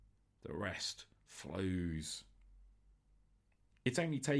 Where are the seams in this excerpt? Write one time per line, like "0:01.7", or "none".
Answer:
none